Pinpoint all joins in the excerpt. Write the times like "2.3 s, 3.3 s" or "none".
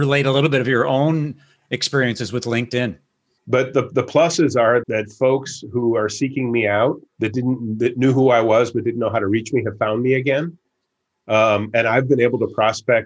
3.4 s, 4.8 s, 7.1 s